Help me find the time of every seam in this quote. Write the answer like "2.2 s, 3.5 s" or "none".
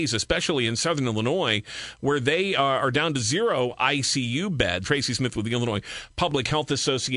4.8 s